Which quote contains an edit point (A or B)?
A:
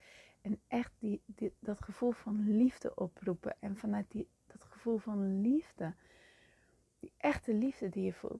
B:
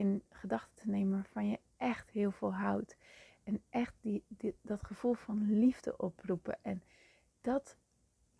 A